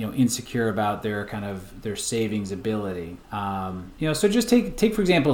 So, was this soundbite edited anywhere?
yes; 1 cut; at 3.2 s

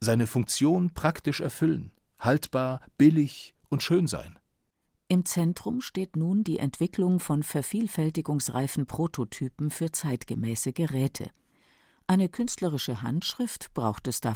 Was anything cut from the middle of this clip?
no; 0 cuts

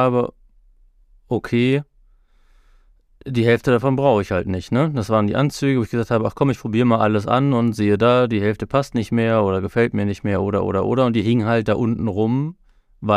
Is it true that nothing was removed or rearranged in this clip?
yes; 0 cuts

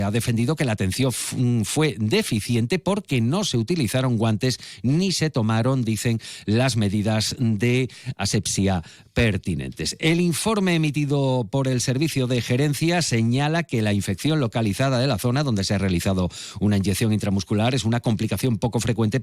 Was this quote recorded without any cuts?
yes; 0 cuts

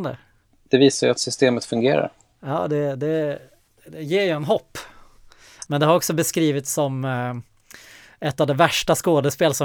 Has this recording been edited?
yes; 1 cut; at 5.7 s

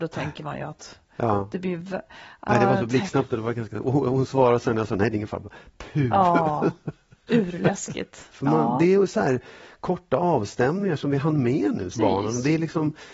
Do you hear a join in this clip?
yes; 2 cuts; at 8.3 s, 11.9 s

